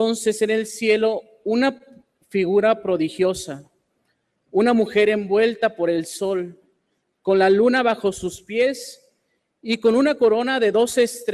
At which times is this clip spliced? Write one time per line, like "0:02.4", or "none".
none